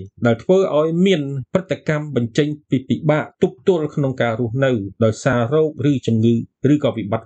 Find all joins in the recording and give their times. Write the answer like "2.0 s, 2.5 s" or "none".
none